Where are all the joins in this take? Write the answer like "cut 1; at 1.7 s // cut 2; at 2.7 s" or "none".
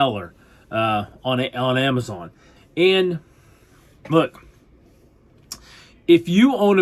cut 1; at 2.6 s